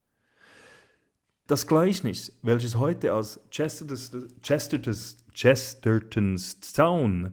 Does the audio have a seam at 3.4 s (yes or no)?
no